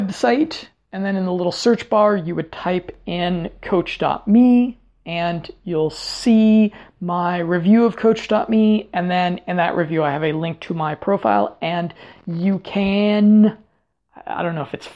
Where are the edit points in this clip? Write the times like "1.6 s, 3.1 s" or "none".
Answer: none